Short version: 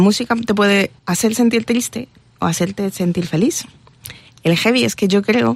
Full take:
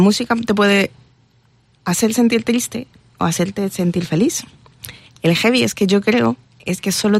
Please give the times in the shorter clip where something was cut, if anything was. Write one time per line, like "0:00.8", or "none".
0:01.0